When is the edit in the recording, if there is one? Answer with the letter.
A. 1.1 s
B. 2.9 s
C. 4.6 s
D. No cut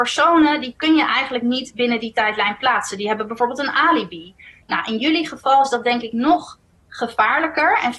C